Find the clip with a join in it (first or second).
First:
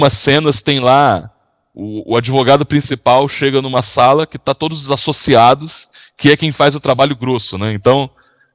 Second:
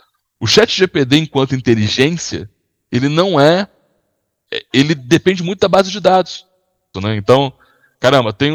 second